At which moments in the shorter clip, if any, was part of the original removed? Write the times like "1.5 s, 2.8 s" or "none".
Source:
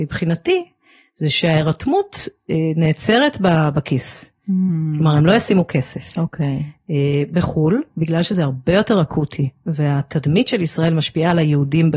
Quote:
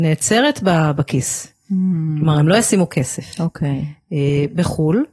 none